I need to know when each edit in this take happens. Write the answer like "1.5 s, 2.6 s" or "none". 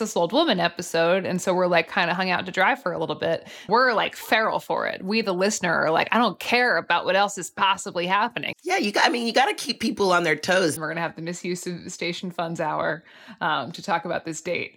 3.7 s, 8.5 s, 10.8 s